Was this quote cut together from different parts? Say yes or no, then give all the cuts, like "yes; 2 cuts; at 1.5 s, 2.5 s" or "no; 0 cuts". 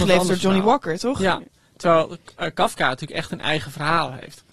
no; 0 cuts